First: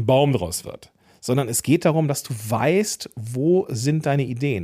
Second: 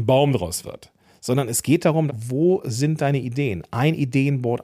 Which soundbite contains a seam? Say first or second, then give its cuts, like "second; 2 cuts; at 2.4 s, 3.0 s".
second; 1 cut; at 2.1 s